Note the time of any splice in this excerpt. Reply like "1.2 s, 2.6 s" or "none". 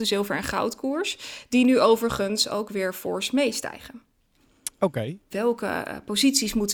5.3 s